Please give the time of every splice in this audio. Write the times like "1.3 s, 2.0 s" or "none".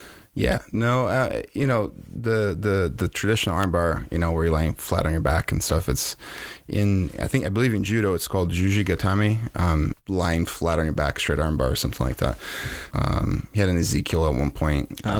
9.9 s, 12.9 s